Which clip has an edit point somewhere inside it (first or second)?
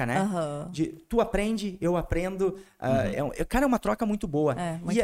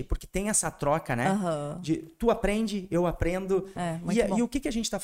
second